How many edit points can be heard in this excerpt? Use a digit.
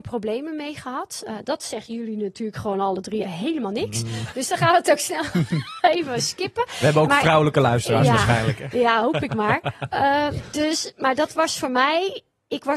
1